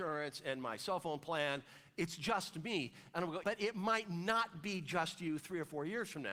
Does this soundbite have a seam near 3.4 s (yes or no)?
yes